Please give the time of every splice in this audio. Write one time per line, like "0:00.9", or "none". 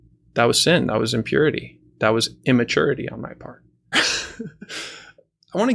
0:03.9